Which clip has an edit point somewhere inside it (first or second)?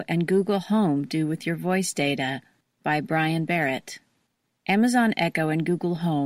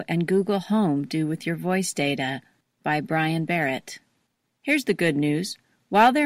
second